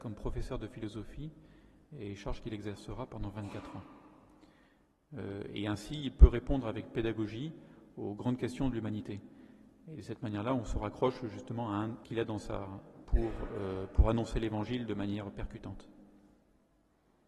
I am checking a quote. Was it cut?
yes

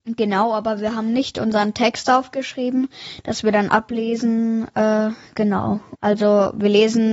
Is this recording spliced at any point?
yes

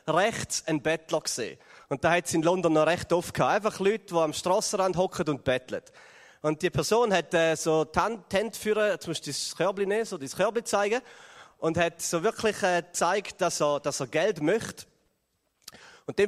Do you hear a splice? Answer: no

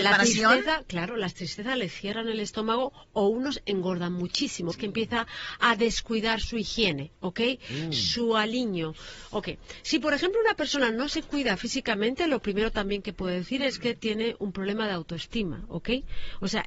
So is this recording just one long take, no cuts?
no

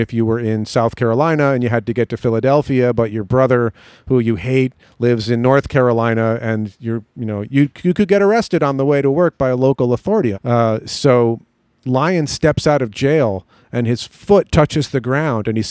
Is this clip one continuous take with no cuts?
no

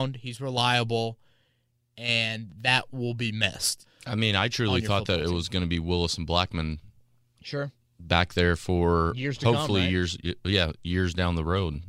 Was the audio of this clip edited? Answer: yes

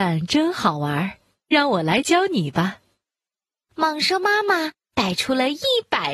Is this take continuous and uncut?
yes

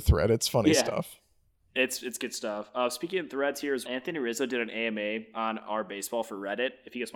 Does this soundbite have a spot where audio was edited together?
yes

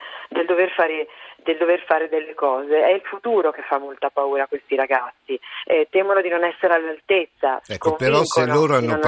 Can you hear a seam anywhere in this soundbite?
no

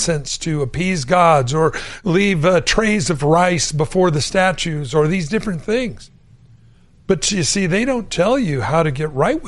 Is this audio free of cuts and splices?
yes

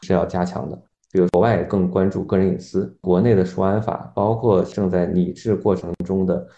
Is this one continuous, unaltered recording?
no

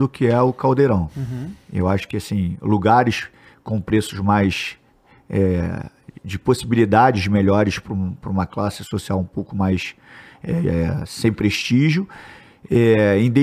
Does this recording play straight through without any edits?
yes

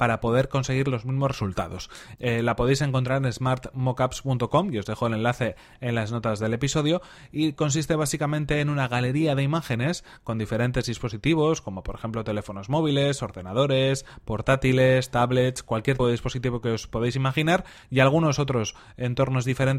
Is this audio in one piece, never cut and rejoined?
no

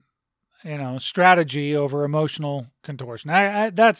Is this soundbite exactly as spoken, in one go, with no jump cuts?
yes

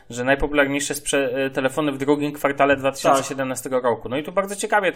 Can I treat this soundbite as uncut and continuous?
yes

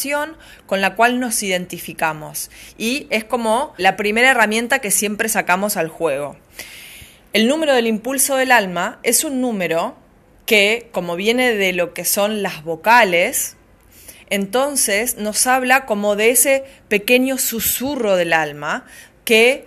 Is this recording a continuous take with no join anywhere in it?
no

